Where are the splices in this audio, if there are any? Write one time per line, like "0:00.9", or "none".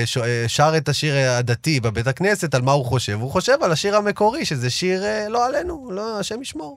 none